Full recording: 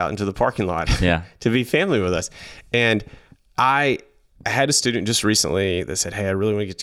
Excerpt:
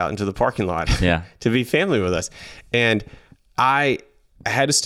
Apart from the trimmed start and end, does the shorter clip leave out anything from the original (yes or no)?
no